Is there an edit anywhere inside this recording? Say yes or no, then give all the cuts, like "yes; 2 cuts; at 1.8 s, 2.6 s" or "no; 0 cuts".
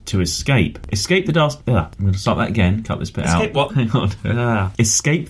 yes; 1 cut; at 3.7 s